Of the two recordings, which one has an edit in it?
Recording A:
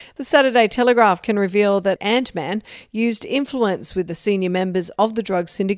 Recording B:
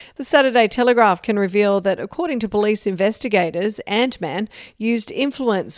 A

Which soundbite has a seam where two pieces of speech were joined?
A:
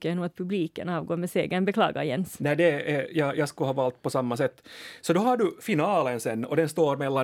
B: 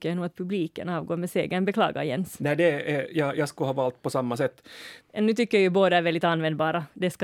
B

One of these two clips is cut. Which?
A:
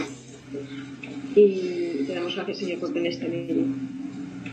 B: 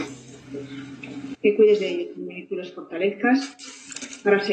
B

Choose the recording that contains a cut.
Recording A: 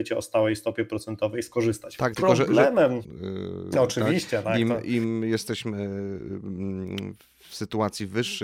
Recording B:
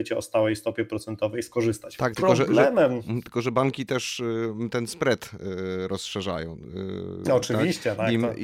A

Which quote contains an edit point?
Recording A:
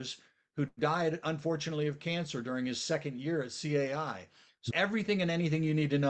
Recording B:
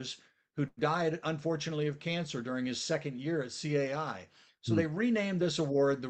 A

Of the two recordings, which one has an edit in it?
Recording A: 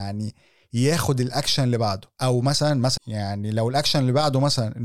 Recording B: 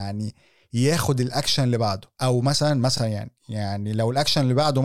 A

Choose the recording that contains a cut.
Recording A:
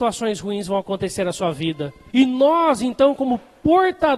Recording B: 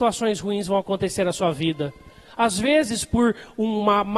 A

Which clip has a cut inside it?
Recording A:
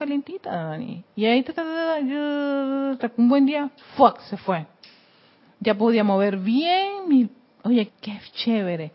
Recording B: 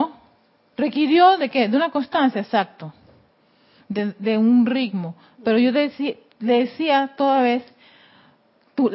A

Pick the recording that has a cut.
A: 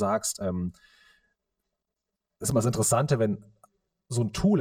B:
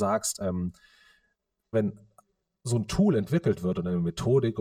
B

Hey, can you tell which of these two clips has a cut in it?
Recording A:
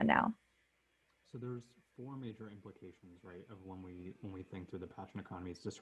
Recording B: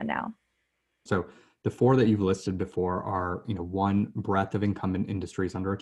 B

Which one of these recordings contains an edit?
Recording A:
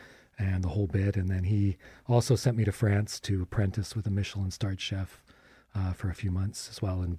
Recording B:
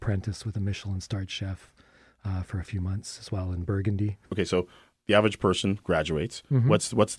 B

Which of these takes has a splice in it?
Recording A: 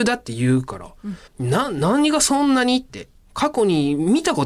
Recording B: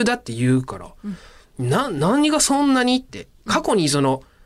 A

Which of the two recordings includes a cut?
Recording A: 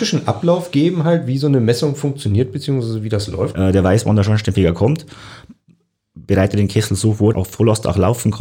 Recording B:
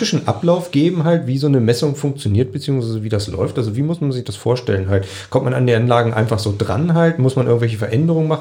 A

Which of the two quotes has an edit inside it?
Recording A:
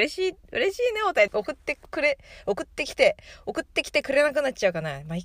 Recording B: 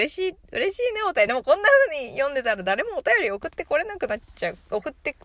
A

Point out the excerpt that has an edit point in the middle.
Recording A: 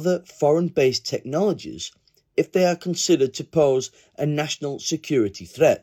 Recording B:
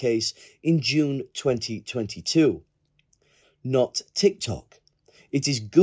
B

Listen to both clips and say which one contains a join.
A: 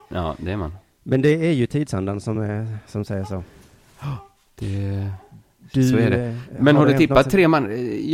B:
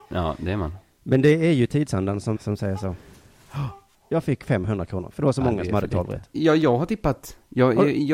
B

